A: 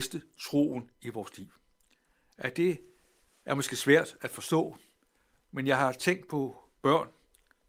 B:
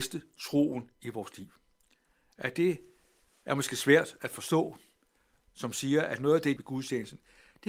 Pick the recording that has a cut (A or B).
B